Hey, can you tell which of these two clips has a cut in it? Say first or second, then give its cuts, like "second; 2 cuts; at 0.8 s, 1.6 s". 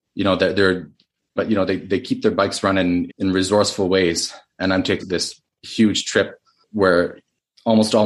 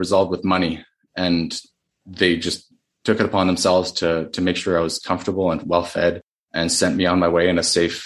first; 3 cuts; at 1.4 s, 3.1 s, 5.0 s